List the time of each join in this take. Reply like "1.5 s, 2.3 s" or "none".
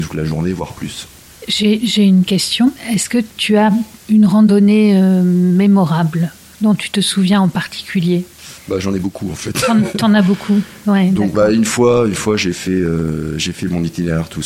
none